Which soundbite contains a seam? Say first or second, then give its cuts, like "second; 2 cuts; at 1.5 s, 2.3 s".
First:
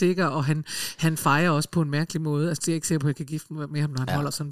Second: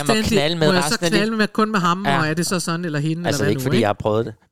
first; 1 cut; at 2.6 s